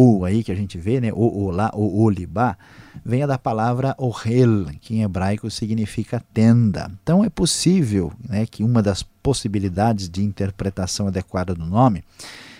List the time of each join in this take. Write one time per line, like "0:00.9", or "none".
none

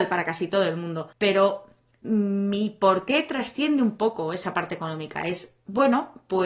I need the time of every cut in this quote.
0:01.1

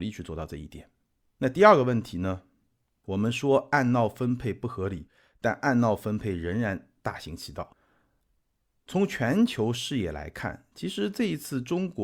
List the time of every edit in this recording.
none

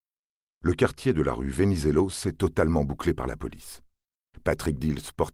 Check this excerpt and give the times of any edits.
none

